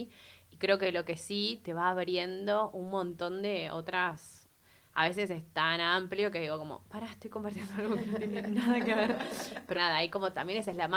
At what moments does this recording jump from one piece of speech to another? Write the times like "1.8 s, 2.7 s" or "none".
9.7 s